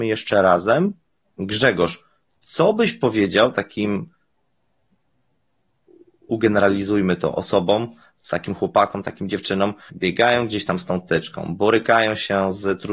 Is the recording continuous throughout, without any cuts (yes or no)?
no